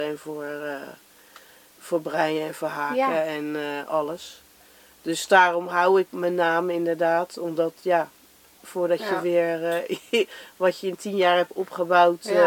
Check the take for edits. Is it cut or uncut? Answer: uncut